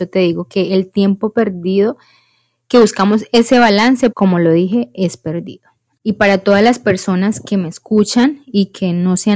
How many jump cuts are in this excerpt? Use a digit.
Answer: 2